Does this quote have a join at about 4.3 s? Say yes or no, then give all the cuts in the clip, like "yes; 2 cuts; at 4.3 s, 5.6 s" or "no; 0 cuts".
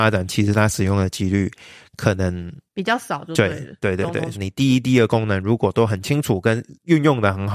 yes; 1 cut; at 4.3 s